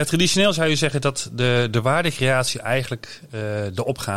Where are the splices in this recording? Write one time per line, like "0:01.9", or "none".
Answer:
none